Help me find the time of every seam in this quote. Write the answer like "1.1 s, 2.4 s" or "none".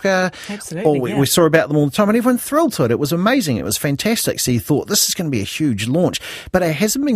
none